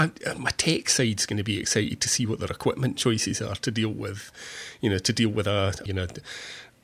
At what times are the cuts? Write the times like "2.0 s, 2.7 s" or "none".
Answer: 5.9 s